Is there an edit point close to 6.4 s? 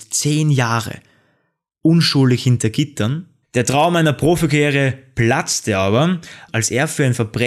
no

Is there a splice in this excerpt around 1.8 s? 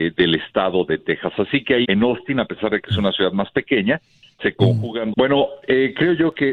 yes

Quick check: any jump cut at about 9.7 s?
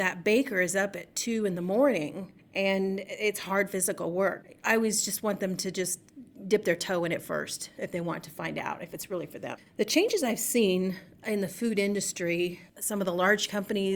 yes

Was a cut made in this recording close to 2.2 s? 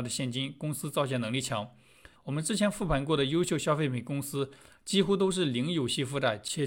yes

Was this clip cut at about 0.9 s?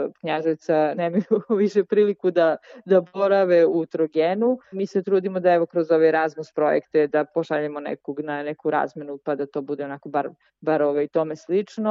yes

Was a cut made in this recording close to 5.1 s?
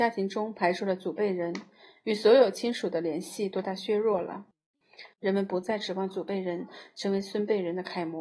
yes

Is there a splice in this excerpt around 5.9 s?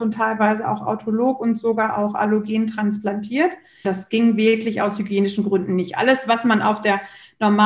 no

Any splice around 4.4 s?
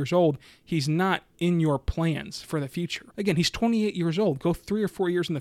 no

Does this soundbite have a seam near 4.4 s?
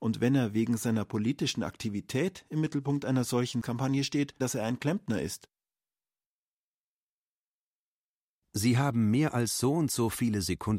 yes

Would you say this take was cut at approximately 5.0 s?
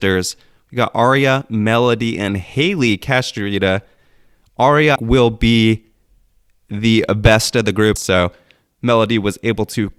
yes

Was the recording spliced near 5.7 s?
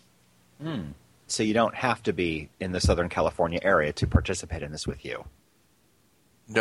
no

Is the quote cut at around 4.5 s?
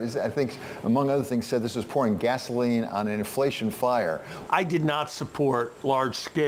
yes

